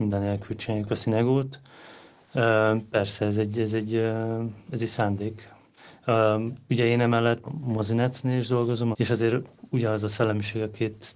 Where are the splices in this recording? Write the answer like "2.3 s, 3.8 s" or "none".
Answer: 7.5 s, 8.9 s